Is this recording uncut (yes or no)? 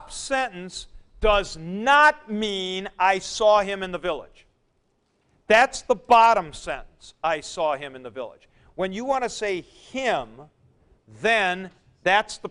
yes